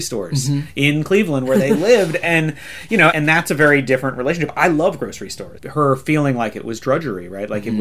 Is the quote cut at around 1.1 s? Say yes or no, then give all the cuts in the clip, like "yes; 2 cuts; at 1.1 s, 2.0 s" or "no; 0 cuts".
no; 2 cuts; at 3.1 s, 5.6 s